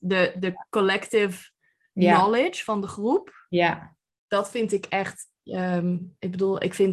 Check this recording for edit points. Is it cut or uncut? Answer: uncut